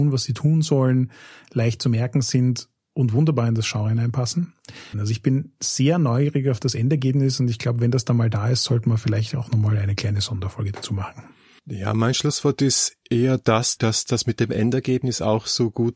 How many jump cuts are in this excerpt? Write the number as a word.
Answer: two